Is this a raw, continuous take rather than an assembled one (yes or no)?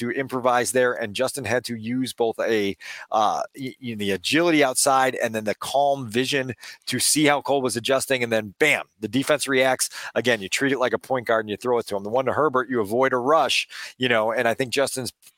yes